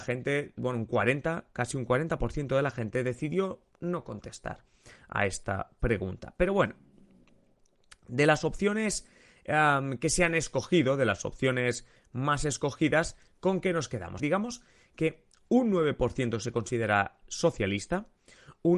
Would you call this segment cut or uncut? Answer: cut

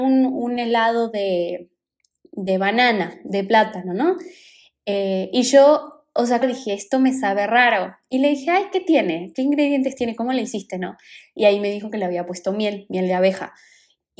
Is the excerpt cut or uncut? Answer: cut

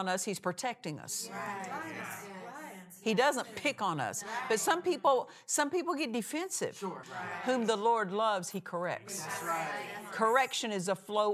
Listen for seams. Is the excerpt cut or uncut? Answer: cut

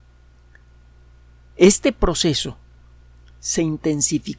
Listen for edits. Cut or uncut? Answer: uncut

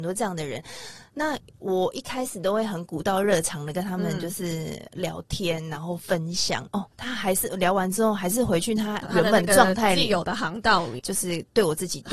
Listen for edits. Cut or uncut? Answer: cut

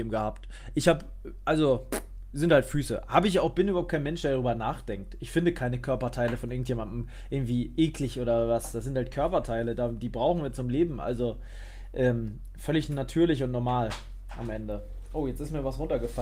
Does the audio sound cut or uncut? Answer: uncut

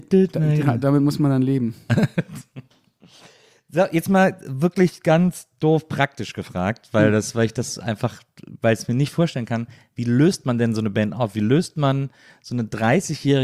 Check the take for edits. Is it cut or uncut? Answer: uncut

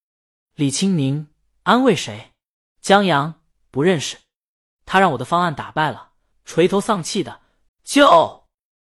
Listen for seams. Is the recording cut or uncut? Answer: cut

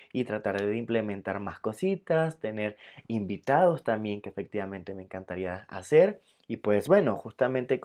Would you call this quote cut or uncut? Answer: uncut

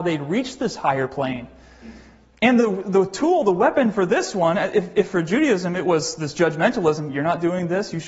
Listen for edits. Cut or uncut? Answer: uncut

